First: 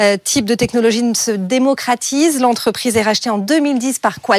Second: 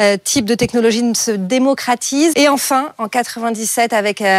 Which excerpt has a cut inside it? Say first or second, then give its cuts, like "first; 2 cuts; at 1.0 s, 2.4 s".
second; 1 cut; at 2.3 s